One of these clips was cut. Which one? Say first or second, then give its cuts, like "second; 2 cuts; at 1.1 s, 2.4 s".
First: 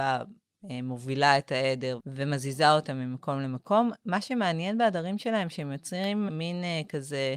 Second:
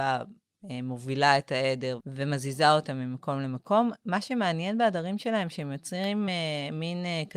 first; 1 cut; at 6.3 s